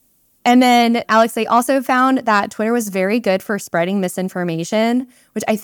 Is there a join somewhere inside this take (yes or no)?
no